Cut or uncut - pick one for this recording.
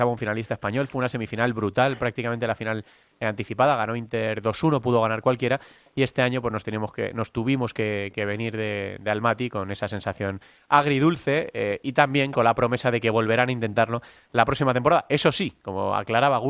uncut